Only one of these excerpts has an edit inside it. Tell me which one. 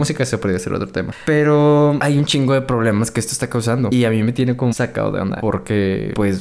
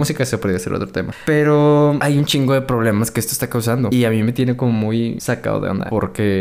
first; 1 cut; at 4.7 s

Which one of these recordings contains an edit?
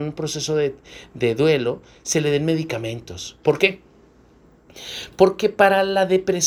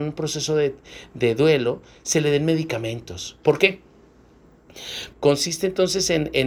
second; 1 cut; at 5.1 s

